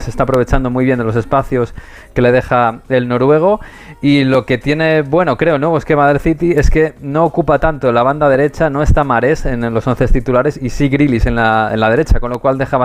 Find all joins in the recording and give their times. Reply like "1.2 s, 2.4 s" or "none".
none